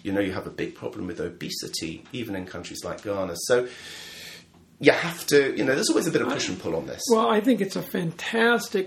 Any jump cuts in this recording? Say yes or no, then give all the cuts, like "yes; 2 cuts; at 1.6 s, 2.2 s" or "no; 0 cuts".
no; 0 cuts